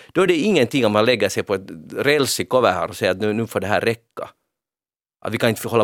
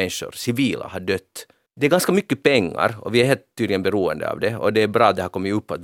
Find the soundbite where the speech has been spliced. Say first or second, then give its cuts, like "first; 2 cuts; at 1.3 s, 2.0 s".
second; 1 cut; at 1.7 s